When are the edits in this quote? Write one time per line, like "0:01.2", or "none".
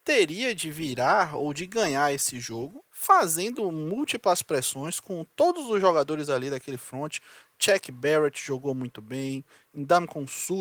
0:02.9